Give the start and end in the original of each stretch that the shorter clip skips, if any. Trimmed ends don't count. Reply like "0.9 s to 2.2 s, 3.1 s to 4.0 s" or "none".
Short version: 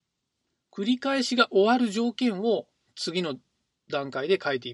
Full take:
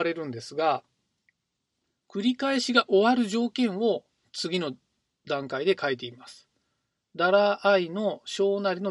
none